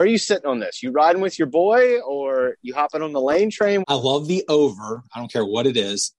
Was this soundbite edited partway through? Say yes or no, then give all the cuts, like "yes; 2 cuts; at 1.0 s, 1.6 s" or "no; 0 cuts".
yes; 1 cut; at 3.8 s